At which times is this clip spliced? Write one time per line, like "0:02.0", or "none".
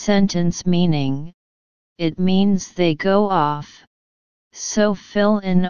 none